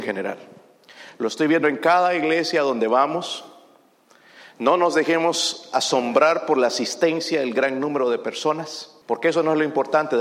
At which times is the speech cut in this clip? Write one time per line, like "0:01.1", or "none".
0:09.0